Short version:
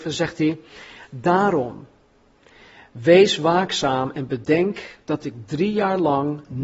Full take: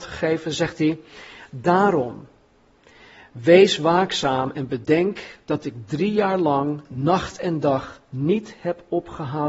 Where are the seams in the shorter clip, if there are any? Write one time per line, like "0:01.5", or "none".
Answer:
none